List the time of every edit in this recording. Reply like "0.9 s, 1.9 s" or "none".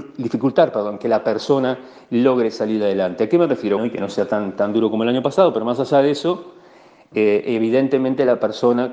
3.8 s